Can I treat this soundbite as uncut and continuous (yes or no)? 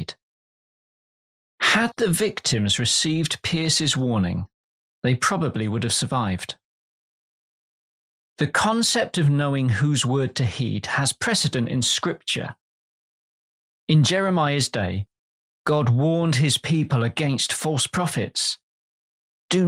no